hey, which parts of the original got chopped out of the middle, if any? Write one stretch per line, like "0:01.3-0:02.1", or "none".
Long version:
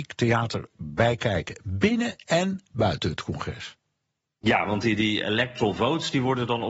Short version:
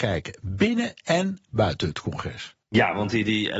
0:03.8-0:04.3